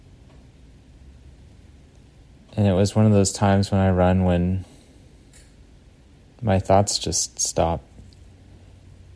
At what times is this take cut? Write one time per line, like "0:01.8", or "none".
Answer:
none